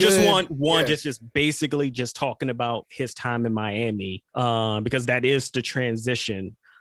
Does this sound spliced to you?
yes; 1 cut; at 4.3 s

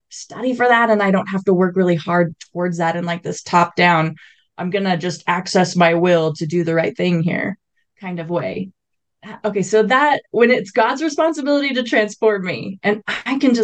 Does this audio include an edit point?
no; 0 cuts

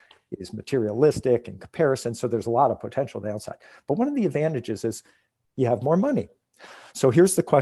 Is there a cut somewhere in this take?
no; 0 cuts

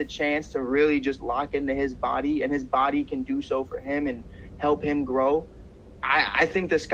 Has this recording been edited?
no; 0 cuts

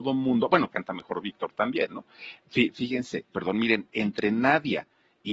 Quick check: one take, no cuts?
no; 1 cut; at 3.3 s

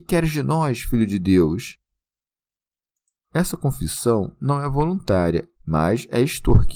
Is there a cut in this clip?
yes; 2 cuts; at 3.2 s, 5.5 s

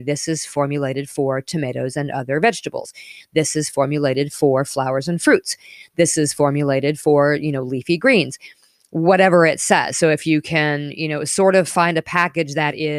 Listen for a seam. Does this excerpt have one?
no; 0 cuts

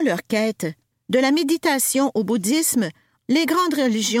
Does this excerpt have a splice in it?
yes; 2 cuts; at 0.9 s, 3.2 s

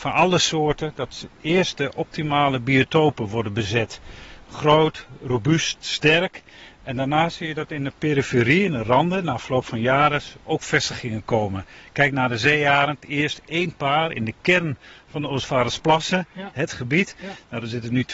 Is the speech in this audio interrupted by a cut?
no; 0 cuts

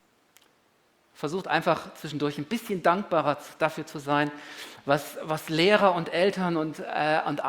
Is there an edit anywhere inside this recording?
no; 0 cuts

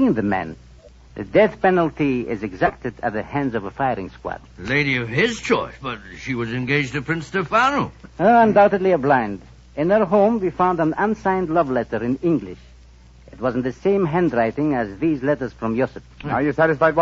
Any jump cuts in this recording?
yes; 2 cuts; at 1.1 s, 4.4 s

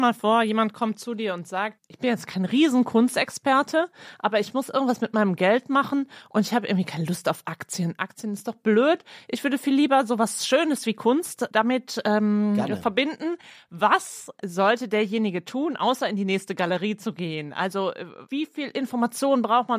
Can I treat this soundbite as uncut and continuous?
no; 1 cut; at 1.8 s

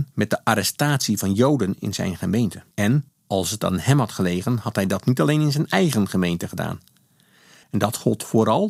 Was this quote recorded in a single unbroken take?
no; 2 cuts; at 2.7 s, 7.6 s

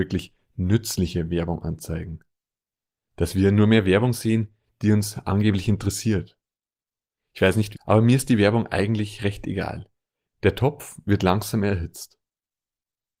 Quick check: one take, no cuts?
no; 2 cuts; at 7.7 s, 10.2 s

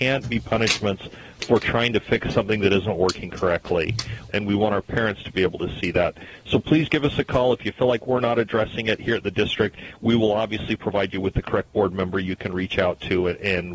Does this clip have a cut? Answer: yes; 1 cut; at 4.3 s

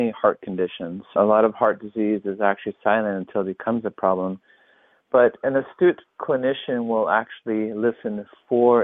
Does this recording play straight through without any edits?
yes; 0 cuts

